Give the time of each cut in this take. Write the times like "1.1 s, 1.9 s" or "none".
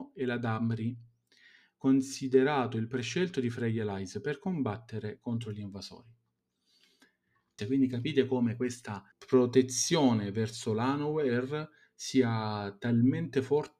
7.6 s, 9.1 s